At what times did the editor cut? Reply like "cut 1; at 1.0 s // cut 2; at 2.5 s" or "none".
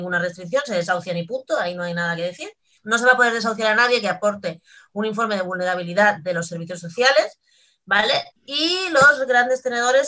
cut 1; at 2.8 s // cut 2; at 8.3 s